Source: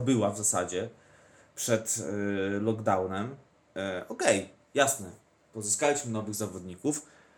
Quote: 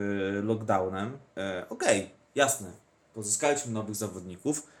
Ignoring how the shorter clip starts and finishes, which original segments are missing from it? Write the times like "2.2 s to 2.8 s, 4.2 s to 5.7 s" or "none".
3.5 s to 3.7 s

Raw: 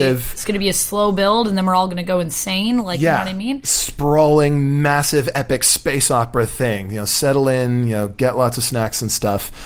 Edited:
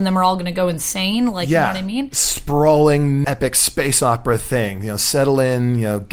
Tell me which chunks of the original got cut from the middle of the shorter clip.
4.8 s to 5.3 s

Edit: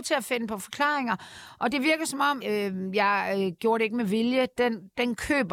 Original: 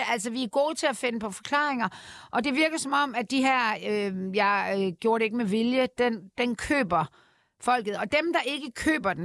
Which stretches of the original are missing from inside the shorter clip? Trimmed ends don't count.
3.1 s to 3.8 s

